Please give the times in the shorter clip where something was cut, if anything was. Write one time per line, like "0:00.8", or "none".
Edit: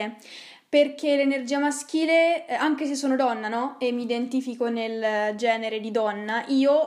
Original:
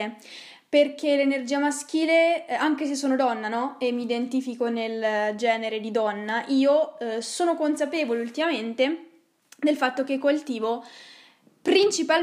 none

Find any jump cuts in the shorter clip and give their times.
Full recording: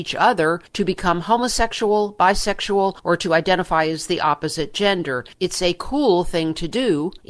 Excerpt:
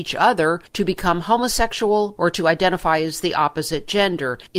0:02.2

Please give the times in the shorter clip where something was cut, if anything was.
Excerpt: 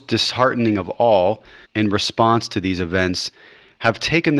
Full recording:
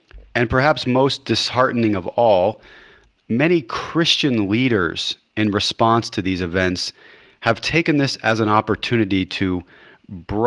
0:01.6

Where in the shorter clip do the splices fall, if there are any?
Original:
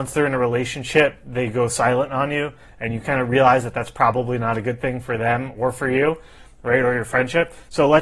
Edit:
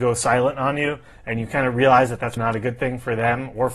0:02.4

